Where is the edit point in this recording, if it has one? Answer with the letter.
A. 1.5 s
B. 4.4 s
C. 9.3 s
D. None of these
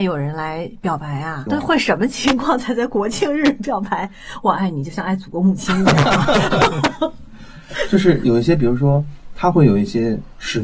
A